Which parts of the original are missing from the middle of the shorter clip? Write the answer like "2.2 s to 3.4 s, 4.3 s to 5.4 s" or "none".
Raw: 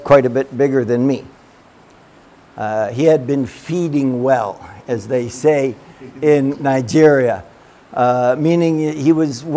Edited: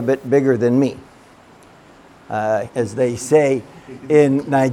2.9 s to 4.8 s